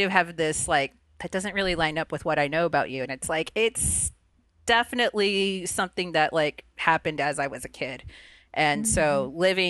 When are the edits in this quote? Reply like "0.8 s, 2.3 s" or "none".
none